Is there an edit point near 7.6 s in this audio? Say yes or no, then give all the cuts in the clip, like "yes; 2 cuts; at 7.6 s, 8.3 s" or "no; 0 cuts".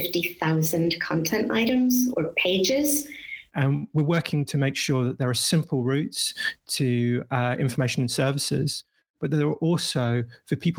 no; 2 cuts; at 2.1 s, 3.5 s